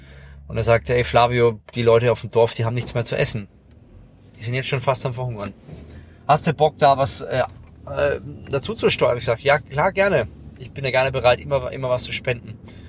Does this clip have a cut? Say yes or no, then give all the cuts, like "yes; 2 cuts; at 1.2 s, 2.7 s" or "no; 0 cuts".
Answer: no; 0 cuts